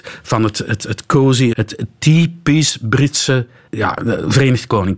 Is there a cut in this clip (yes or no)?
yes